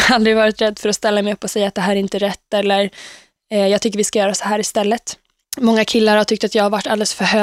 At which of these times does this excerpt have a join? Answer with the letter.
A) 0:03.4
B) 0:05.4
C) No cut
B